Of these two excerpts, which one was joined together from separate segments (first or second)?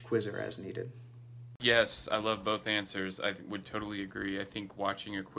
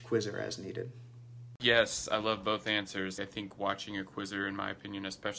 second